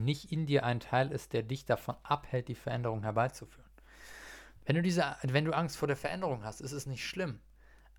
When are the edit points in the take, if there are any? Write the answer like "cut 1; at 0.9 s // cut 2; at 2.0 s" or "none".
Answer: cut 1; at 4.6 s